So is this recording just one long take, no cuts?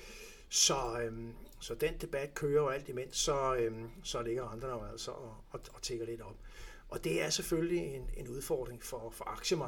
yes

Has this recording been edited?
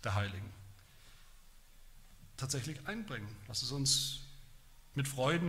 no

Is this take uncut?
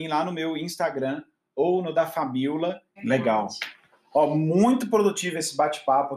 no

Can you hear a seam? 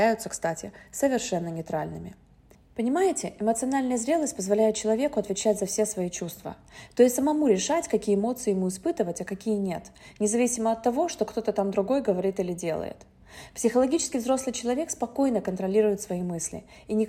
no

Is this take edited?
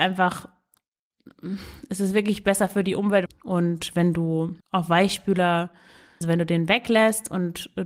yes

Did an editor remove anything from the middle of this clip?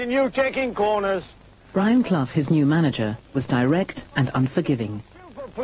yes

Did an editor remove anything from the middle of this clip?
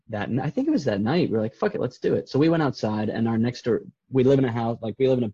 no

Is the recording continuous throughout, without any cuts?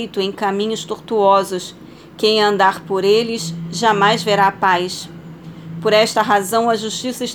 yes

